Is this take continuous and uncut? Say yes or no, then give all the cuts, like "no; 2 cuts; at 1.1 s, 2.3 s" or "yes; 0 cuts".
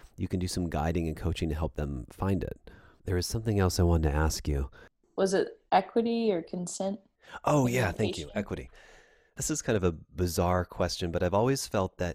yes; 0 cuts